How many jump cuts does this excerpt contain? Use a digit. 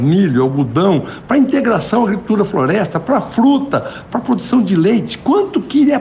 1